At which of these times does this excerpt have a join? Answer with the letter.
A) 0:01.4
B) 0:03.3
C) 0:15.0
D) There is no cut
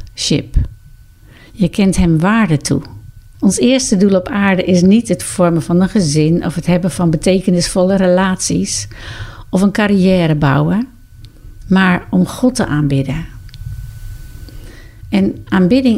B